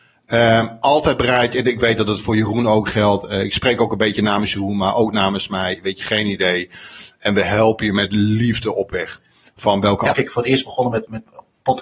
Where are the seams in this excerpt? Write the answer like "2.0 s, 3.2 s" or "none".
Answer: 6.0 s, 10.1 s

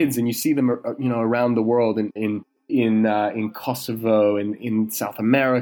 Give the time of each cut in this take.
2.2 s

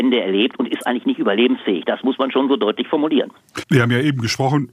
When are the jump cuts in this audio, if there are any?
3.6 s

